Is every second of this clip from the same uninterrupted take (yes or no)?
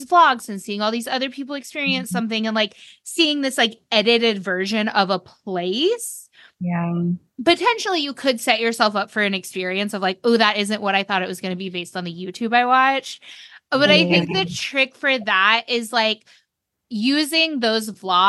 yes